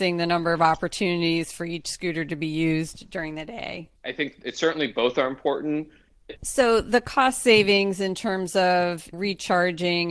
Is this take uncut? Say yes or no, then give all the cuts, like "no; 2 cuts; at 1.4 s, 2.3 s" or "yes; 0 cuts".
no; 1 cut; at 6.4 s